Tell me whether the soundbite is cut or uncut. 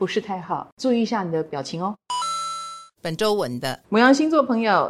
cut